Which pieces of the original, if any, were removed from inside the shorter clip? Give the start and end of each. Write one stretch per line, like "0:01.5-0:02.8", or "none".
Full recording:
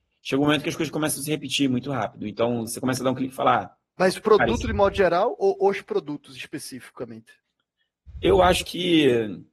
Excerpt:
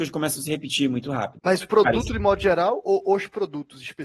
0:02.2-0:03.9